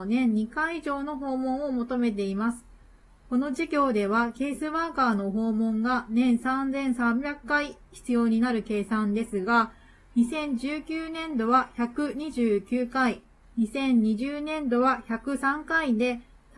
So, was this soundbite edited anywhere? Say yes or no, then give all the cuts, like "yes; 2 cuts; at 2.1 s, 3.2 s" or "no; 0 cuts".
no; 0 cuts